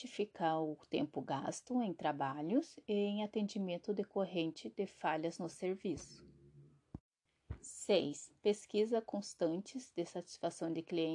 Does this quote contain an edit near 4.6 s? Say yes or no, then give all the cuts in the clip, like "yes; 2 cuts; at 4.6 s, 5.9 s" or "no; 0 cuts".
no; 1 cut; at 8.4 s